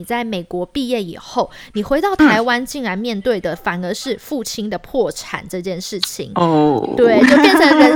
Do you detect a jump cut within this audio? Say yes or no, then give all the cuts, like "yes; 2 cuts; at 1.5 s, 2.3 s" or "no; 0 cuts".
no; 0 cuts